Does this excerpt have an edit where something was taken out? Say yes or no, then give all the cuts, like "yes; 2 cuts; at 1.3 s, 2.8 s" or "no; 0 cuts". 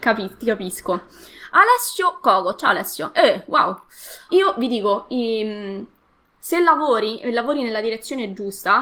yes; 1 cut; at 4.3 s